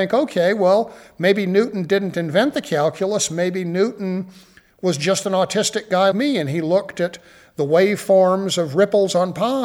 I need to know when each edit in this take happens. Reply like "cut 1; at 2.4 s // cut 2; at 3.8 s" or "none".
cut 1; at 6.1 s